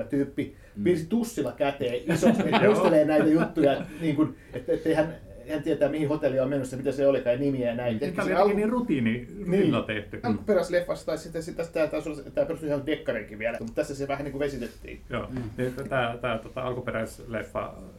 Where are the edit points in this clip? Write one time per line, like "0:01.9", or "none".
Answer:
0:08.0
0:10.2
0:13.6